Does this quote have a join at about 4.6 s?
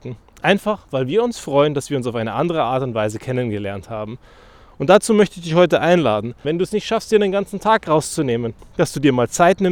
no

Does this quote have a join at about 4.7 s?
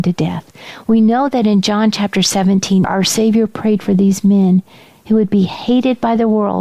no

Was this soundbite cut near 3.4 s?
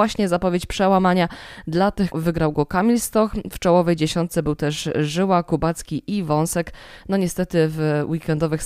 no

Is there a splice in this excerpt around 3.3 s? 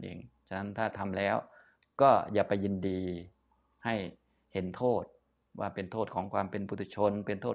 no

